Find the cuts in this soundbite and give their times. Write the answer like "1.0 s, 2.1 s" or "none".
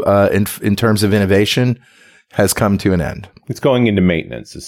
none